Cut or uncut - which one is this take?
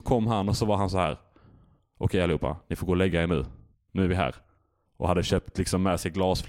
uncut